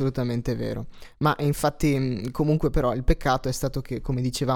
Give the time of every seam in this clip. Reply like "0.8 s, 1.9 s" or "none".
none